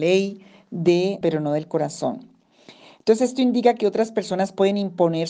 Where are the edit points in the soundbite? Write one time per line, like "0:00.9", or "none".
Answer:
0:01.2